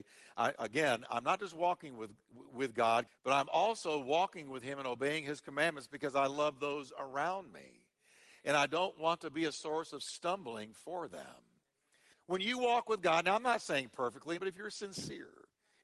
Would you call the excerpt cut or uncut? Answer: cut